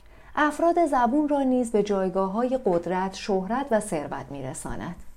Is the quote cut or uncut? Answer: uncut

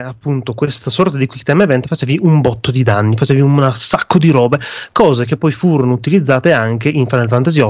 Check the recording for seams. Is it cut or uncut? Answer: uncut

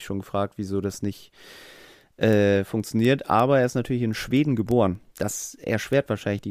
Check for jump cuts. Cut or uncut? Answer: uncut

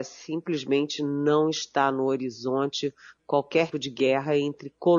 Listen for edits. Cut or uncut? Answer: cut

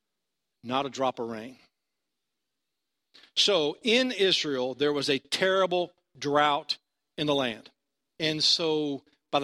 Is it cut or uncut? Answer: cut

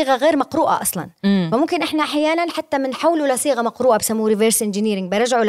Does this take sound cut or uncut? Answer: uncut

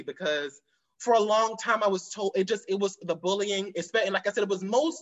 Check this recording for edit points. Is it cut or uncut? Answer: uncut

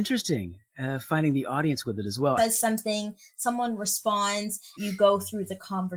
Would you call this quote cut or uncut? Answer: cut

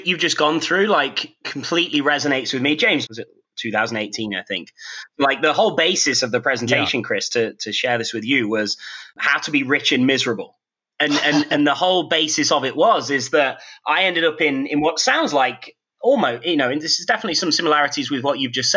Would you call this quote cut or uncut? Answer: cut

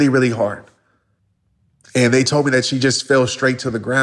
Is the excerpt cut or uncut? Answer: uncut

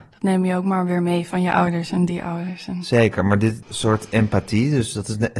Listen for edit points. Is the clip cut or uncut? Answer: cut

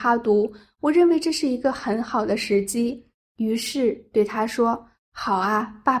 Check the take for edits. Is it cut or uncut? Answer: uncut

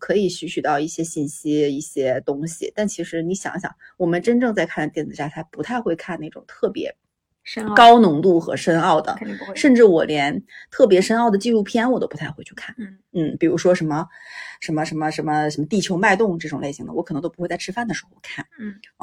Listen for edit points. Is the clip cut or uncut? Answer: uncut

